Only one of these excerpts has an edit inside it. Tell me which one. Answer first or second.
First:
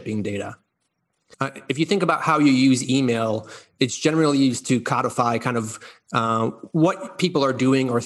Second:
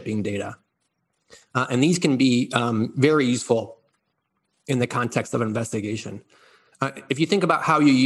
first